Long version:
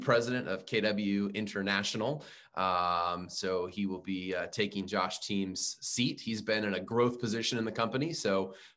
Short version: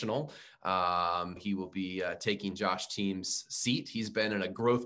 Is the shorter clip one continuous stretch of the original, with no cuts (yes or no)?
no